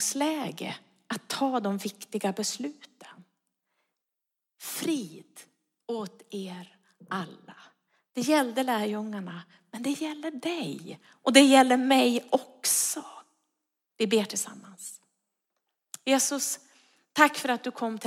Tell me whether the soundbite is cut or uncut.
uncut